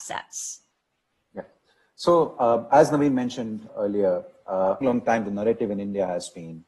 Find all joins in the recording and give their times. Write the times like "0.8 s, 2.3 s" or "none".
3.7 s, 4.8 s